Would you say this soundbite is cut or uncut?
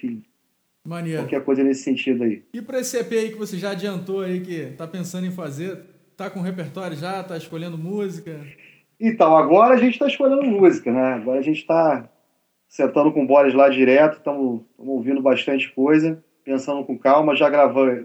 uncut